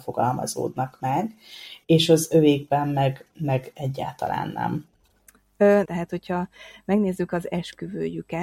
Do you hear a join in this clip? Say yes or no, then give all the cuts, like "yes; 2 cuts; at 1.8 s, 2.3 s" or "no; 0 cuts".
yes; 1 cut; at 5.8 s